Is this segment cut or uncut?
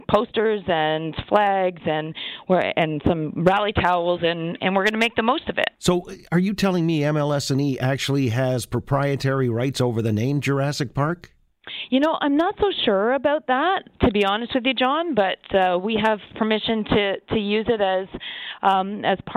cut